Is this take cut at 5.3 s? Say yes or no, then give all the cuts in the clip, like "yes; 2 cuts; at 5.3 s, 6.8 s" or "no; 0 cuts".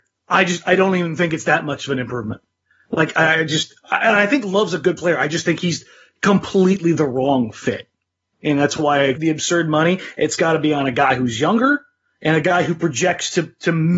no; 1 cut; at 9.1 s